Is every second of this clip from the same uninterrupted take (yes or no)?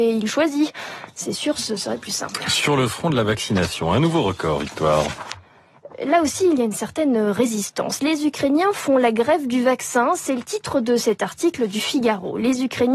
yes